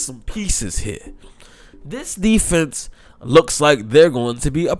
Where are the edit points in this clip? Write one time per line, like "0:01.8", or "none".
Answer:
none